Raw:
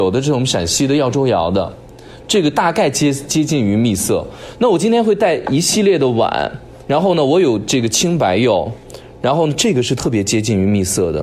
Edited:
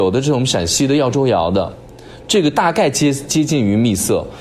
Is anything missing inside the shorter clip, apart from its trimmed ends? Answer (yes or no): no